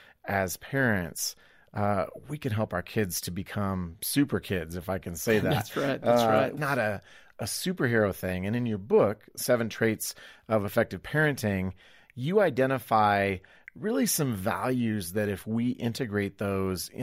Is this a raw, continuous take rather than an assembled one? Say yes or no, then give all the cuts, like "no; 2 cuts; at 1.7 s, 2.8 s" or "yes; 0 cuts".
no; 1 cut; at 6.6 s